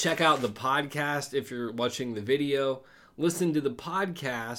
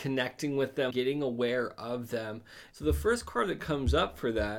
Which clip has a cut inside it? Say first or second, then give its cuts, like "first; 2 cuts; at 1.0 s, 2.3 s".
second; 2 cuts; at 0.9 s, 2.7 s